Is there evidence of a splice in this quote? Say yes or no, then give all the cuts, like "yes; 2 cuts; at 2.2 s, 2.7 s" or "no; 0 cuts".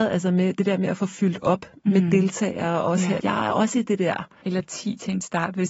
yes; 2 cuts; at 3.2 s, 4.4 s